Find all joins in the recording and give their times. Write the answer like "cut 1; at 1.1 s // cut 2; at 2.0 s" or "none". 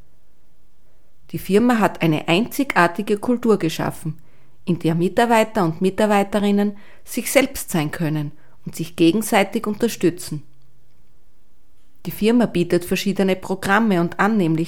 none

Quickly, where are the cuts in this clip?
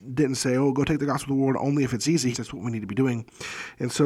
cut 1; at 2.3 s

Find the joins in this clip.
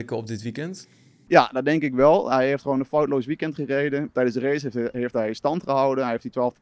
none

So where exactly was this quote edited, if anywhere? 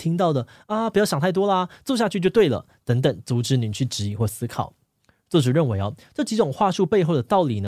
none

